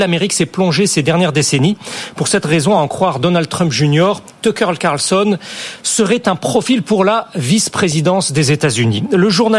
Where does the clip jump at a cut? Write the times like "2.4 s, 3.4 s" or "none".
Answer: none